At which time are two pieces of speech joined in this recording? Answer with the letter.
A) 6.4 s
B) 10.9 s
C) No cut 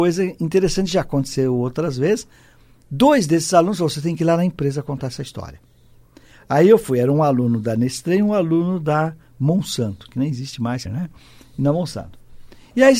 B